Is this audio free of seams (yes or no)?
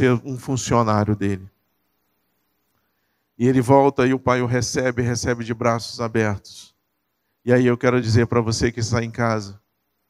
yes